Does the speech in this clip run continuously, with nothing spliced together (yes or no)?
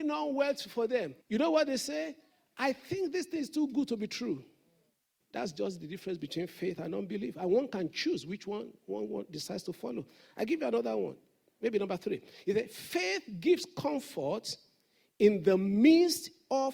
no